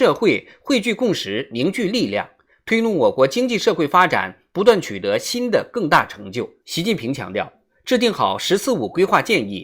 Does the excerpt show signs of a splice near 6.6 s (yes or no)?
yes